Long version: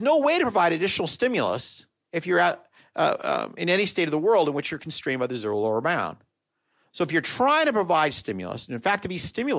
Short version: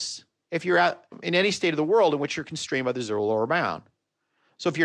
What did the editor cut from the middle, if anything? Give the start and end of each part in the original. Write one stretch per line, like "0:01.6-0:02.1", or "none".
0:02.7-0:03.5